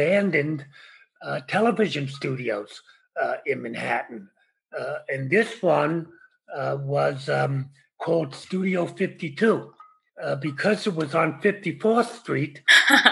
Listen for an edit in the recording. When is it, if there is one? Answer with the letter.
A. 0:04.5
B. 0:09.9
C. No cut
C